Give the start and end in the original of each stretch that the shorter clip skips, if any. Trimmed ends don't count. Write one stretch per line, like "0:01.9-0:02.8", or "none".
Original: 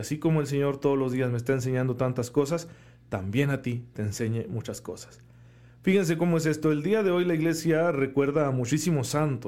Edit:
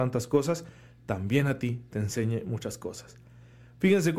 none